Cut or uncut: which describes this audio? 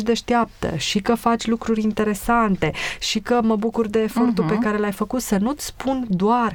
uncut